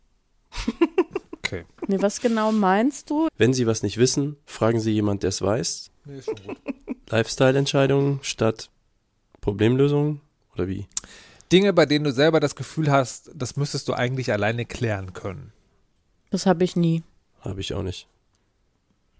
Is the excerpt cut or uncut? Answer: cut